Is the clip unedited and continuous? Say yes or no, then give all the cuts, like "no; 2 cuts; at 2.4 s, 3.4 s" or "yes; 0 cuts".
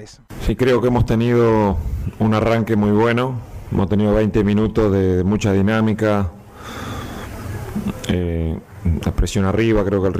yes; 0 cuts